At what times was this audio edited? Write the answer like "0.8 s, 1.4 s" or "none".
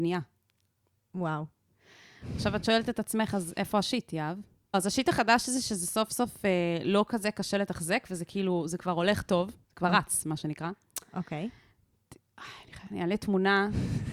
none

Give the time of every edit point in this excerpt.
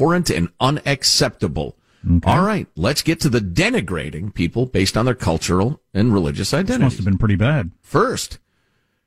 7.8 s

